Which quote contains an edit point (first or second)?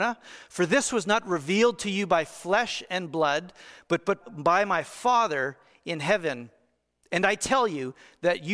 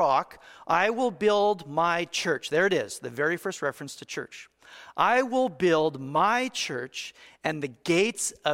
first